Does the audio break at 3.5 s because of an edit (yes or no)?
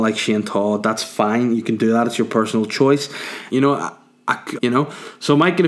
yes